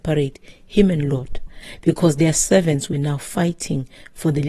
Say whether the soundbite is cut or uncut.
uncut